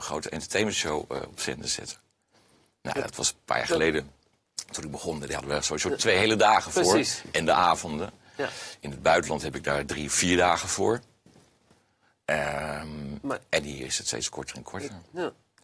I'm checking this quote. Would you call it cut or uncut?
uncut